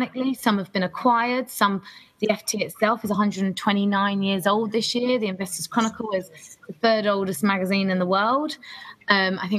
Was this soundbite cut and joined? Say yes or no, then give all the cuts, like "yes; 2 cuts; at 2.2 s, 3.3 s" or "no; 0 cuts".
no; 0 cuts